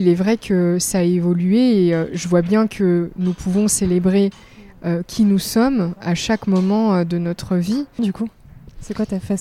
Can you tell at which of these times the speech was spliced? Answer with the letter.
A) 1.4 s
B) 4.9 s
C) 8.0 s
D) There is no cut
C